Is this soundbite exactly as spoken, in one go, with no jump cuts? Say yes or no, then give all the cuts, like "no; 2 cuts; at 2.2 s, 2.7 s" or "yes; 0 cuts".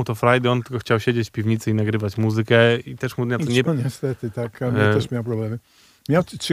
no; 1 cut; at 3.6 s